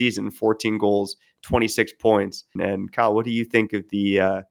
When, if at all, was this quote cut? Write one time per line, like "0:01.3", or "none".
0:02.6